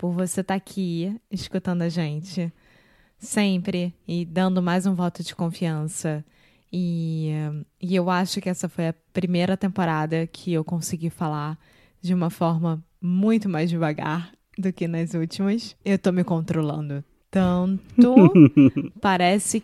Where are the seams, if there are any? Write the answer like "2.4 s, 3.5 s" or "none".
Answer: 15.8 s